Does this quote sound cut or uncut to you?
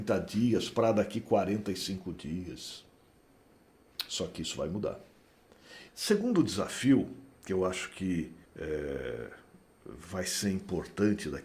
cut